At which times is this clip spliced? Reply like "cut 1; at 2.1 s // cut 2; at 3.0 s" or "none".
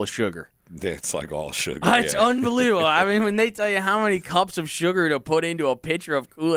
none